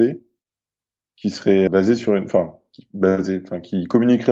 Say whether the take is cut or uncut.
cut